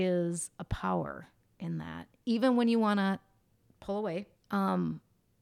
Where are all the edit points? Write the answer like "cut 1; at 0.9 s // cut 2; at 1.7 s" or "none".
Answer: cut 1; at 4.4 s